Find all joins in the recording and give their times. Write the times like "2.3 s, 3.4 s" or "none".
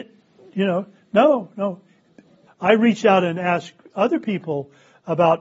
2.5 s